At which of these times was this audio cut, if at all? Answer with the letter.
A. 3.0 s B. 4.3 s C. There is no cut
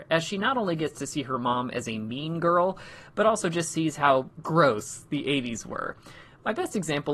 B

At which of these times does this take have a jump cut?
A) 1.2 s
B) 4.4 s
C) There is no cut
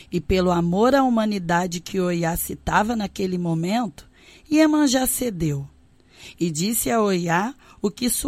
C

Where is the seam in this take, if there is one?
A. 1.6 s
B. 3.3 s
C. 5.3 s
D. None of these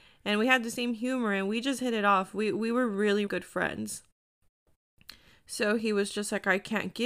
B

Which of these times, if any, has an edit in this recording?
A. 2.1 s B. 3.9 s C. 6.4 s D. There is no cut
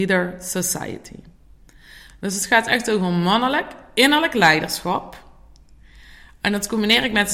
D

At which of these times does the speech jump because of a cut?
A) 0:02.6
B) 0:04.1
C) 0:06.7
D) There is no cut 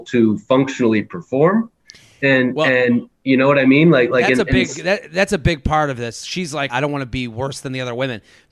C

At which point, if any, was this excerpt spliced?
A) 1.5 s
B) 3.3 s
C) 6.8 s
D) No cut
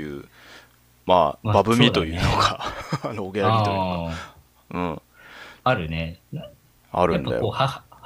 D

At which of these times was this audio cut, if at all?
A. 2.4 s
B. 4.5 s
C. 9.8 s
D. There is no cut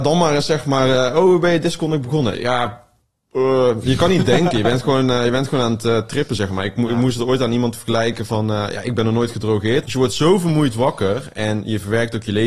C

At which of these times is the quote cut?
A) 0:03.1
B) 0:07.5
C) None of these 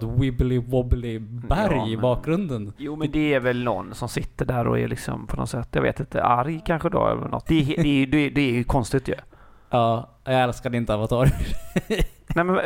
B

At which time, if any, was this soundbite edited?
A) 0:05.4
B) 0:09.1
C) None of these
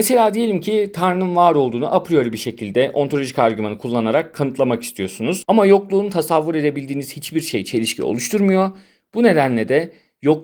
A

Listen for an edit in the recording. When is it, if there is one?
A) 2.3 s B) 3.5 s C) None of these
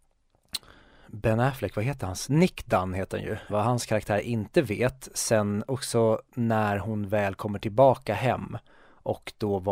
B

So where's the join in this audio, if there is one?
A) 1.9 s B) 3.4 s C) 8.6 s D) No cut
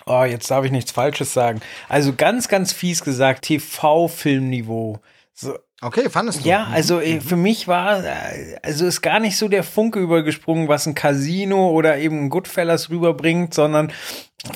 B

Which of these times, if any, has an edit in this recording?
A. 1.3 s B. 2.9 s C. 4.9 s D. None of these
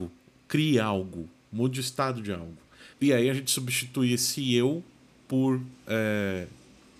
B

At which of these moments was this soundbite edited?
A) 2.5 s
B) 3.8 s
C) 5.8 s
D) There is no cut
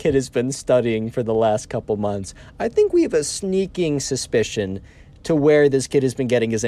D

